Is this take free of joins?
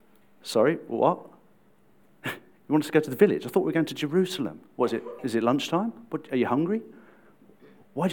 yes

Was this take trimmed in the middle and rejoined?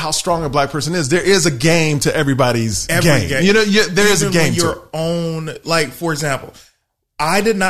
no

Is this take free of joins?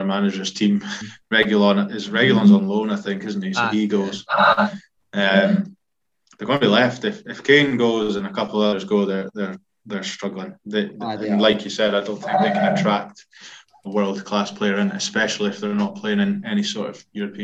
no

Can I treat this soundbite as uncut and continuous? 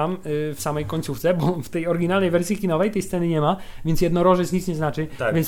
yes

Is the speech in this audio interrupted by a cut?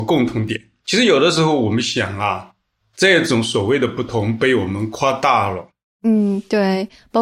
no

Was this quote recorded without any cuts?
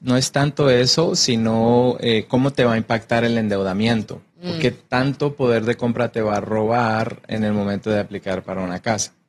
no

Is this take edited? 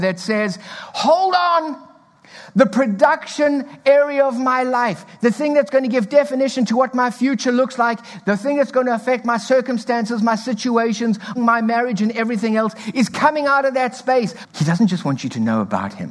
yes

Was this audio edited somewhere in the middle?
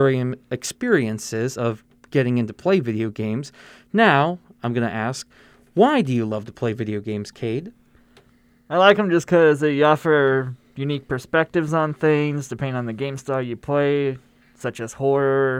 no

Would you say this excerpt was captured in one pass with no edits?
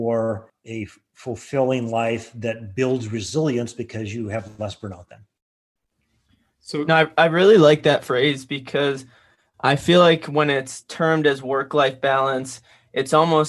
yes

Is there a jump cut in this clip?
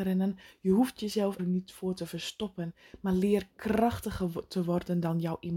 yes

